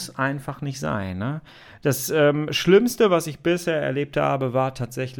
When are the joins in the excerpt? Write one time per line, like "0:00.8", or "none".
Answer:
none